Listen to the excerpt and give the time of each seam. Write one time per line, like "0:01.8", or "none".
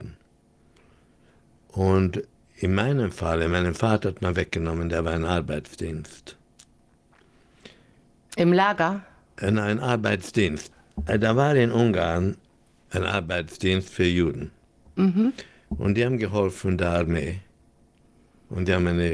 none